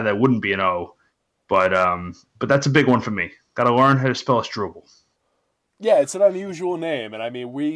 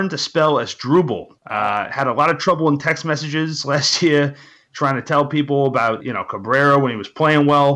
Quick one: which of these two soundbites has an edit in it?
second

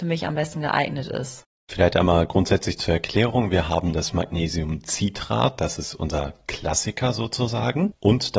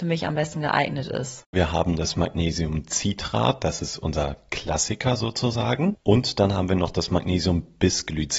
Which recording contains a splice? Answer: second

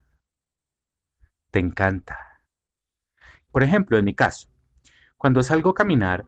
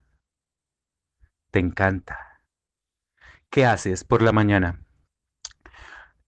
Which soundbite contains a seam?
first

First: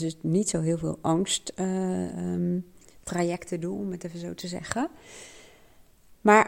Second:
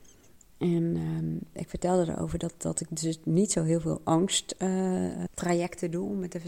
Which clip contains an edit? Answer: second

